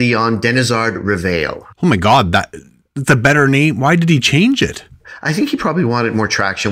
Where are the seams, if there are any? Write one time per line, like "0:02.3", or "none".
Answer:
none